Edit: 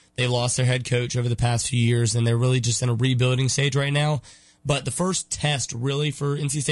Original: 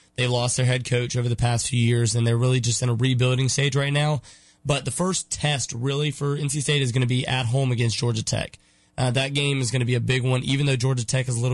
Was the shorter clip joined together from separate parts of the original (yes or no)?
no